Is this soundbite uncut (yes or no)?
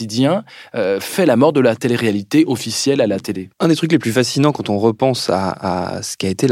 no